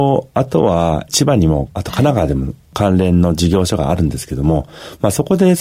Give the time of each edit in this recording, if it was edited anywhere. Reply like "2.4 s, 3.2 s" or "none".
none